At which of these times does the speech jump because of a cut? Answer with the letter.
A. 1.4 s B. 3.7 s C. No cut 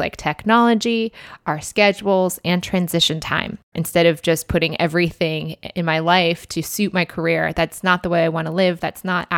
B